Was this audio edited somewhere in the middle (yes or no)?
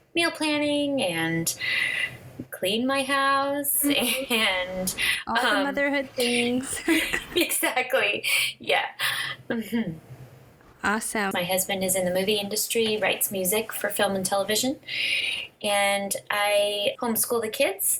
yes